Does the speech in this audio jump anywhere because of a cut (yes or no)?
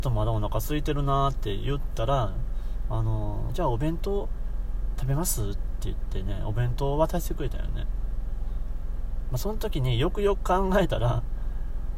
yes